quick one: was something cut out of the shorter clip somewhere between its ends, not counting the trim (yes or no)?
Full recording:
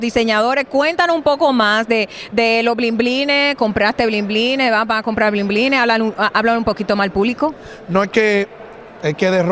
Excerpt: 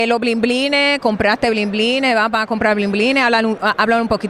no